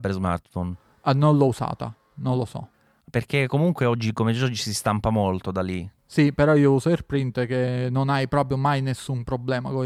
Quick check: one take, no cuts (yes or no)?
yes